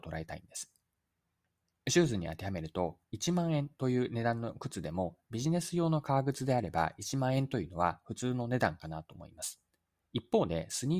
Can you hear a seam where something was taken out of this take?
no; 0 cuts

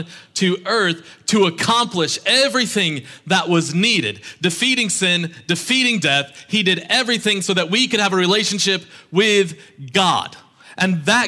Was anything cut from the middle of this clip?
no; 0 cuts

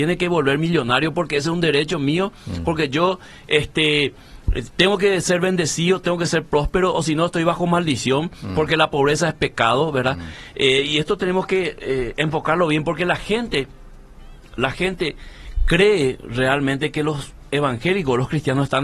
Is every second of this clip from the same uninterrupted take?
yes; 0 cuts

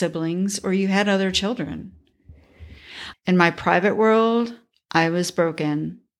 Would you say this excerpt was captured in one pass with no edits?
no; 1 cut; at 3.1 s

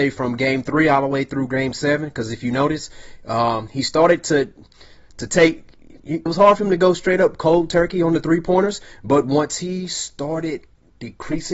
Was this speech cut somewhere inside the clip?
yes; 1 cut; at 6.3 s

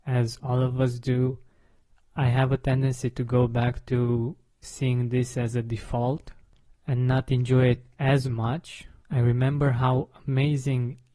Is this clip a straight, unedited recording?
no; 1 cut; at 9.0 s

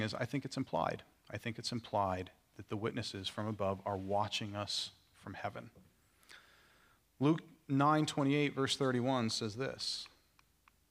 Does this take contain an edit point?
no; 0 cuts

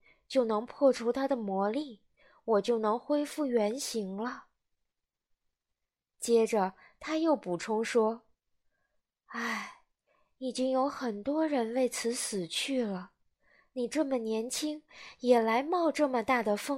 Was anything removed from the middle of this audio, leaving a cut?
no; 0 cuts

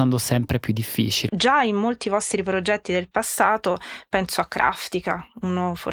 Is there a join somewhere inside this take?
yes; 1 cut; at 1.3 s

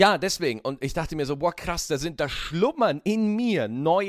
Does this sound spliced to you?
no; 0 cuts

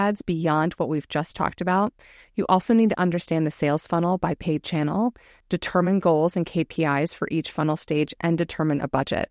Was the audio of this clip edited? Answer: no; 0 cuts

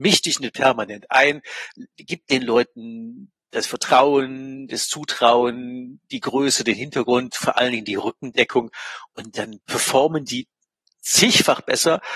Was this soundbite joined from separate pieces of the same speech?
no; 0 cuts

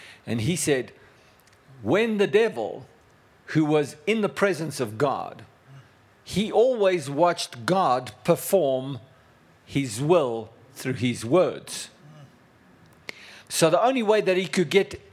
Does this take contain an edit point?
yes; 1 cut; at 13.4 s

